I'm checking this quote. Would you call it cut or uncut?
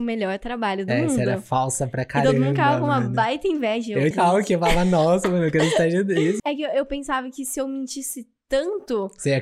cut